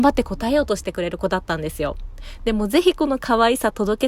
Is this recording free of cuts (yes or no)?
yes